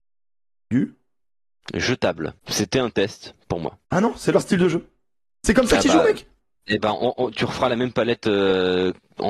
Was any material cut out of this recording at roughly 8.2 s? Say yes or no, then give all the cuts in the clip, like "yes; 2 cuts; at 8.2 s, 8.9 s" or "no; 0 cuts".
no; 2 cuts; at 2.4 s, 3.8 s